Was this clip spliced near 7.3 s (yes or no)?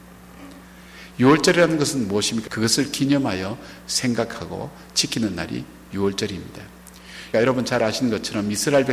yes